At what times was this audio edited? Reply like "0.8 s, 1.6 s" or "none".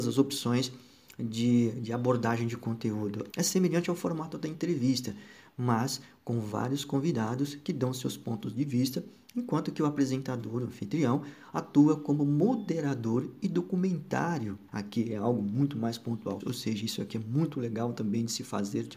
3.3 s, 14.7 s, 16.4 s